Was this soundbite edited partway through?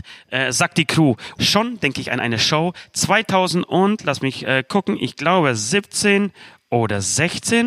yes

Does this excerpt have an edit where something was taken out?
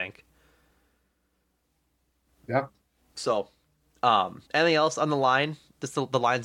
yes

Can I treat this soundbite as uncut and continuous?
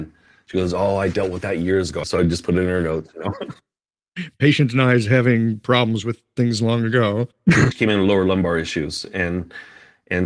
no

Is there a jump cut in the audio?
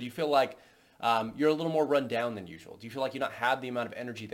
no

